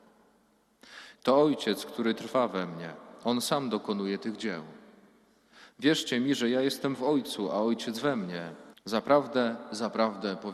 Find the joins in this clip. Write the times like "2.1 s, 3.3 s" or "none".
1.2 s, 8.7 s